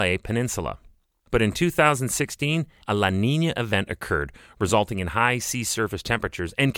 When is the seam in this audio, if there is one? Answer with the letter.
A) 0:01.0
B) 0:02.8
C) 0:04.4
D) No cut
B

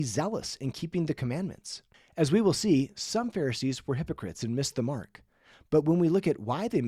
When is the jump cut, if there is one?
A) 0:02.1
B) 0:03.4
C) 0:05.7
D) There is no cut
D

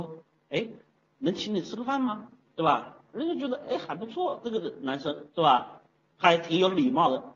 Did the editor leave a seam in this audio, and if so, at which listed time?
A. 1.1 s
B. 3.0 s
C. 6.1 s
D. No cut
A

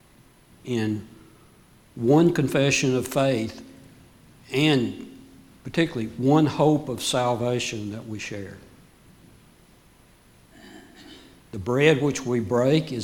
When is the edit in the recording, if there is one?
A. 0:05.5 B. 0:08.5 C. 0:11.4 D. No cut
C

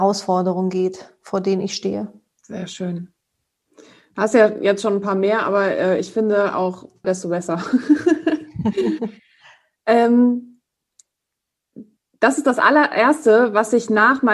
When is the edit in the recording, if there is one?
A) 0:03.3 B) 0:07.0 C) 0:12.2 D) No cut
B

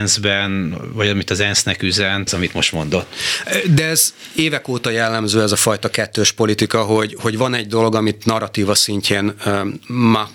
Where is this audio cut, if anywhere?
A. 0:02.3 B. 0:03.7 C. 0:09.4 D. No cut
A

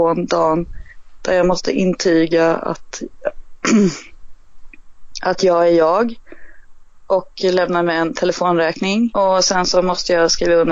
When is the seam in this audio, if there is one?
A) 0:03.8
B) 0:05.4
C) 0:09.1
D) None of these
C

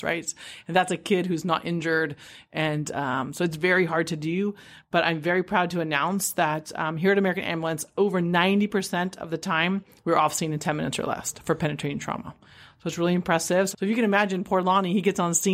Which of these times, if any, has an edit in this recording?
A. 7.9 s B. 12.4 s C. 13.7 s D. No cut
C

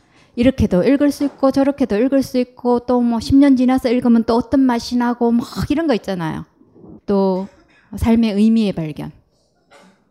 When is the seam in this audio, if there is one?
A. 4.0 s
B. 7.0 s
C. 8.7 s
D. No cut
B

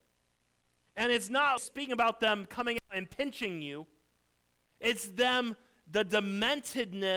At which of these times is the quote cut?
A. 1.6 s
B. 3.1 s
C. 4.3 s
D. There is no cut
A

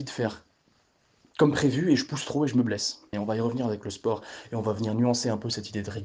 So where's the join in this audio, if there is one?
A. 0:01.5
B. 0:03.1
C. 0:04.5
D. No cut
B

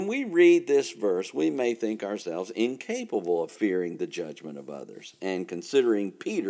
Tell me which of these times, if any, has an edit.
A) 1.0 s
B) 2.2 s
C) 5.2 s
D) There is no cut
D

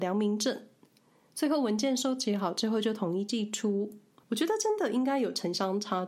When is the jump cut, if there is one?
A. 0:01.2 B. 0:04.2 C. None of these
B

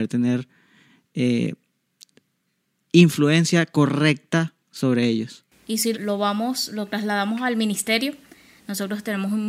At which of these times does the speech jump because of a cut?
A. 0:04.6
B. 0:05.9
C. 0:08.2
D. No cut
B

